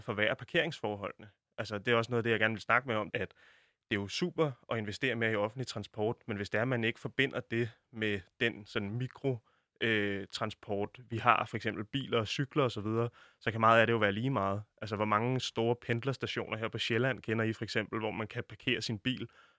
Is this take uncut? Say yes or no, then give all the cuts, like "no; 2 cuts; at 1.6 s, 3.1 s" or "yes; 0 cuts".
no; 1 cut; at 3.1 s